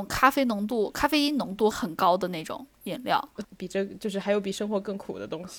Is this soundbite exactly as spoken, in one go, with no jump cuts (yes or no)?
no